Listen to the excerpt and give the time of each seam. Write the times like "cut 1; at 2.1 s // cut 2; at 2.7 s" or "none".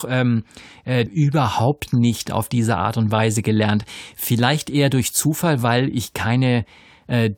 cut 1; at 1.1 s